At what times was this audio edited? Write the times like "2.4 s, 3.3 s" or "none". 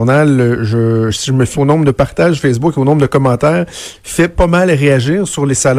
1.5 s